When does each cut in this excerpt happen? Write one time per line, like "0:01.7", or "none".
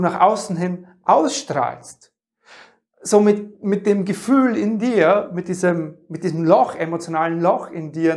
none